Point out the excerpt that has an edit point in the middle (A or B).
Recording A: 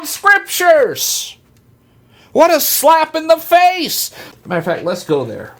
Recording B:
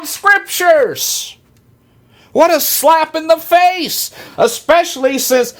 A